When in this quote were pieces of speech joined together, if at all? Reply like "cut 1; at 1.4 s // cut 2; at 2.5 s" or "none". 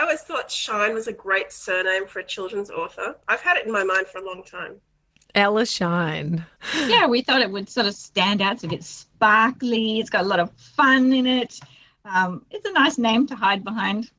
none